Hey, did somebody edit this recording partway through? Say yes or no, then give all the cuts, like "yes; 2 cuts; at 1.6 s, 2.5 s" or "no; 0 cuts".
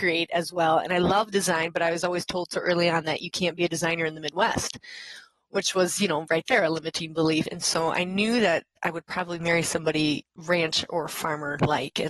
yes; 2 cuts; at 7.4 s, 10.3 s